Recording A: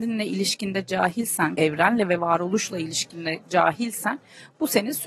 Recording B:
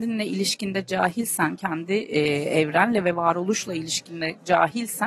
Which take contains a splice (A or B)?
A